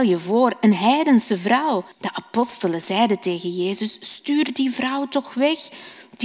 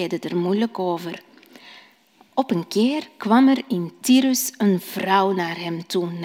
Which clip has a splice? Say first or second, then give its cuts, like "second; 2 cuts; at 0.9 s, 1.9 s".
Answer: first; 1 cut; at 1.9 s